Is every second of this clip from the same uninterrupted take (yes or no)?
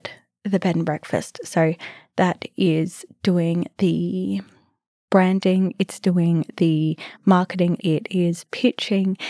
no